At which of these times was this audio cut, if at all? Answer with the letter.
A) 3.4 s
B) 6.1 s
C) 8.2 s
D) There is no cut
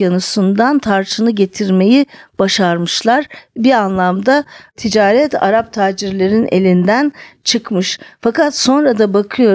D